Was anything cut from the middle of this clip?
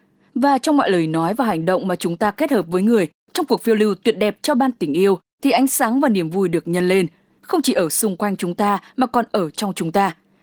no; 0 cuts

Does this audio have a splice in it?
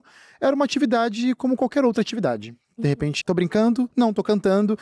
yes; 1 cut; at 3.2 s

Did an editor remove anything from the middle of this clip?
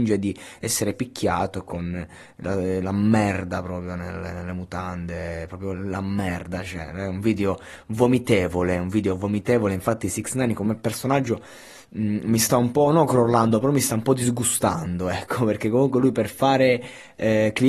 no; 0 cuts

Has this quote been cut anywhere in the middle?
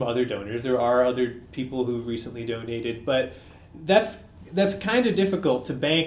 no; 0 cuts

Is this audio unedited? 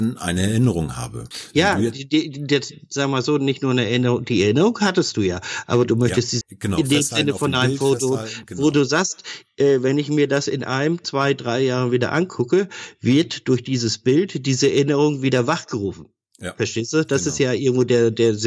no; 1 cut; at 6.4 s

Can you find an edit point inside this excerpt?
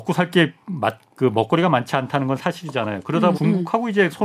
yes; 1 cut; at 3.3 s

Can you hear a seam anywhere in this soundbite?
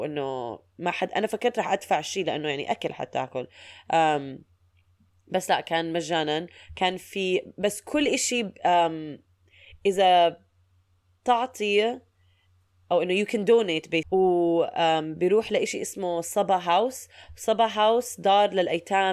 yes; 1 cut; at 14.0 s

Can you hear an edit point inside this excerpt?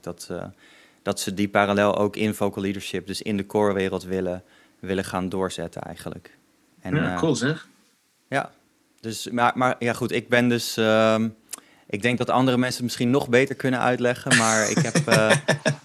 no; 0 cuts

